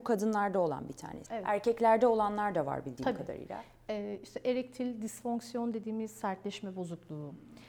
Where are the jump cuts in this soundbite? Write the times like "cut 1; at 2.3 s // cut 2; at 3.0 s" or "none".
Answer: cut 1; at 1.3 s